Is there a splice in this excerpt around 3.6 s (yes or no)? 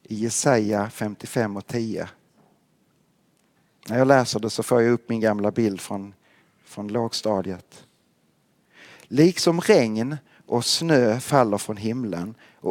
no